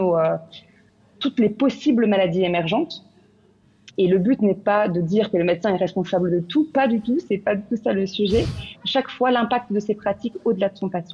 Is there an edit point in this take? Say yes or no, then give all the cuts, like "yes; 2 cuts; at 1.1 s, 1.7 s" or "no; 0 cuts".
yes; 2 cuts; at 3.9 s, 8.7 s